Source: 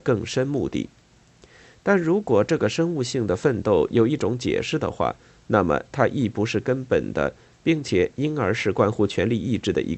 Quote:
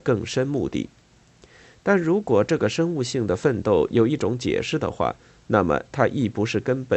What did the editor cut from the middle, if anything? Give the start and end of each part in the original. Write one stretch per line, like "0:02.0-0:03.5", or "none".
none